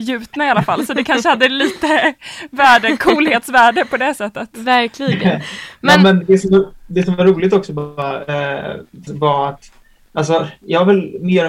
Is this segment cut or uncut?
cut